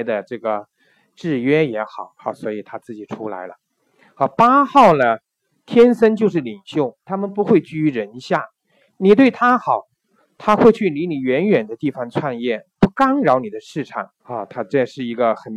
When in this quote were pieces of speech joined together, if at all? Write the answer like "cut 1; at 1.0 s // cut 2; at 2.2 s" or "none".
cut 1; at 14.2 s